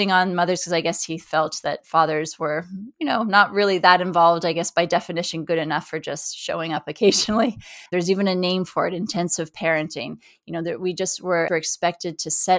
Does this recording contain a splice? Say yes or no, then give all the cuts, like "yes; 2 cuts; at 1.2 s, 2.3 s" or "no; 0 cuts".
yes; 2 cuts; at 7.9 s, 11.5 s